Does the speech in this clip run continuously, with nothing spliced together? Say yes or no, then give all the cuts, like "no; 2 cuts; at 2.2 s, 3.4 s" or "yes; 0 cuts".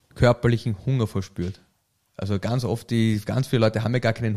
yes; 0 cuts